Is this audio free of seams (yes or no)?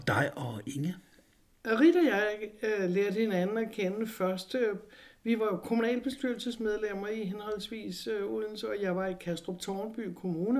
yes